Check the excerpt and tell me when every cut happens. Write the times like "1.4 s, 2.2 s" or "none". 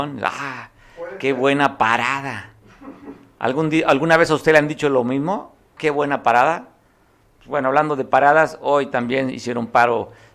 5.8 s